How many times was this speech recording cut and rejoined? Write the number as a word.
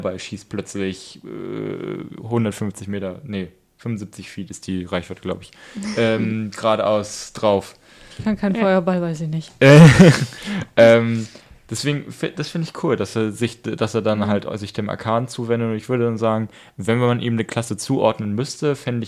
zero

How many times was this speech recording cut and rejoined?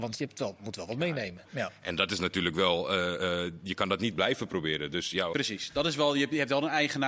two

